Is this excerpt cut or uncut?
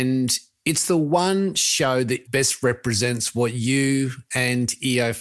cut